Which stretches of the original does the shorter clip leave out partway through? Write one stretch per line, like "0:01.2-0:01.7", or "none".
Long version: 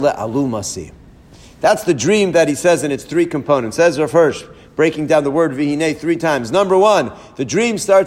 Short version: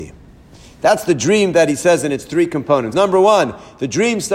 0:03.7-0:06.5